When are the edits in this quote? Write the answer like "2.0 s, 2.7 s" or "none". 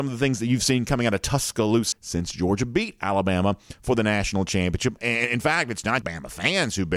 1.9 s, 5.0 s, 6.0 s